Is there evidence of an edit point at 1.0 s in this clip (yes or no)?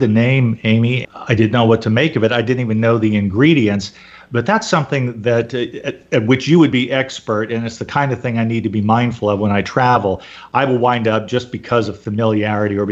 yes